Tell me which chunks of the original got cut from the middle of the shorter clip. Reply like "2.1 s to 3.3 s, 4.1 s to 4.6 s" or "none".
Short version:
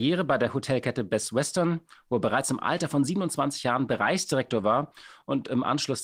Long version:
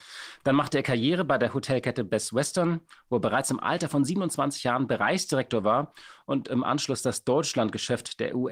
none

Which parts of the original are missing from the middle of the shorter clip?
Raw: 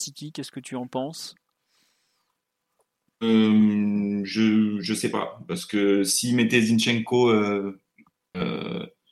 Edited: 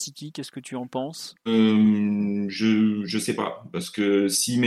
1.4 s to 3.1 s

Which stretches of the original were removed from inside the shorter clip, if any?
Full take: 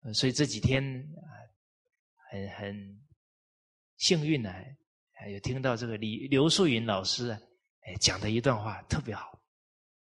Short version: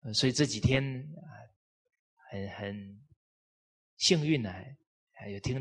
none

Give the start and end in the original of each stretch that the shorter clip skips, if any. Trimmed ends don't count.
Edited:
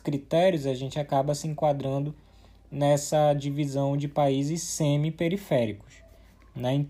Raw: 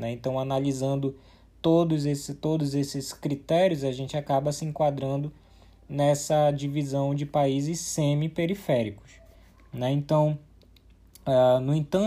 none

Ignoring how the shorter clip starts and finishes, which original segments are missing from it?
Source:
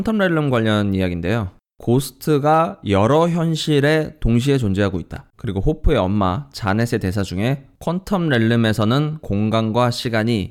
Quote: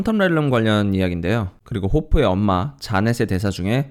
1.6 s to 5.3 s

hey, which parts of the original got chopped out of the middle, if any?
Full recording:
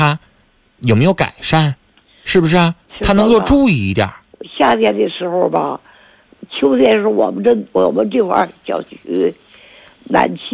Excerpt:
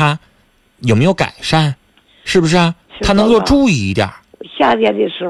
none

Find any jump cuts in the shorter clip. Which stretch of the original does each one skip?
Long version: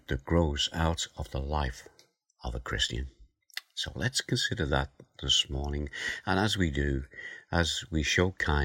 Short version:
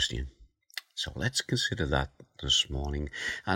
none

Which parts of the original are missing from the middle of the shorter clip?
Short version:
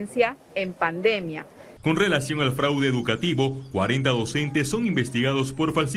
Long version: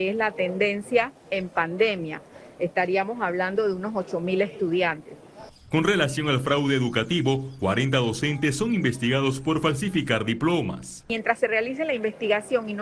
2.5 s to 5.6 s

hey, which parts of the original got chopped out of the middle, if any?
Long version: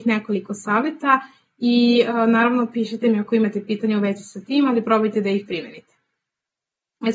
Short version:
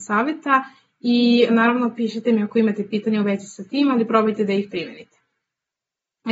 2.1 s to 2.2 s

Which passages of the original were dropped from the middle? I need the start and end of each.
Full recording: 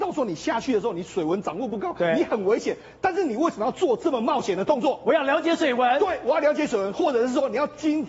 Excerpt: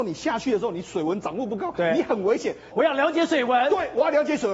2.9 s to 5.0 s

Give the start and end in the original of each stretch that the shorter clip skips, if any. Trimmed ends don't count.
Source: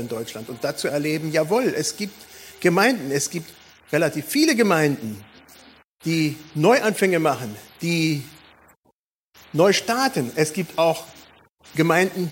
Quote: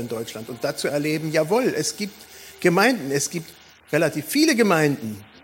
none

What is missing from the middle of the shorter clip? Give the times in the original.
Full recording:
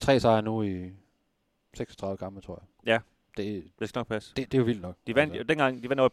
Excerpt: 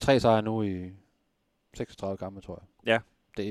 none

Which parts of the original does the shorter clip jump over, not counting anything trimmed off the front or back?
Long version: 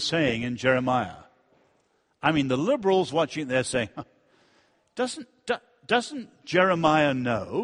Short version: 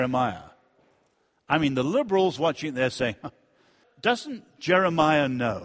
4.6 s to 5.7 s

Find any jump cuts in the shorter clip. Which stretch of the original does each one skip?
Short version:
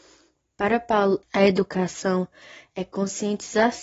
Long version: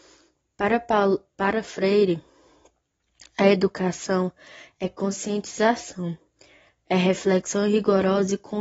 1.2 s to 3.3 s

